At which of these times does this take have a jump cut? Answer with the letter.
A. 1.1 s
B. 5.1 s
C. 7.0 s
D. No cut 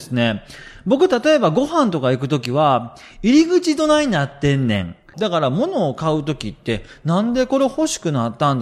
B